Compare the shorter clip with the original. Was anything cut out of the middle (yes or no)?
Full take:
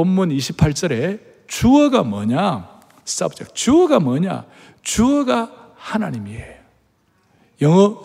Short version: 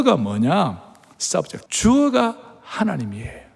yes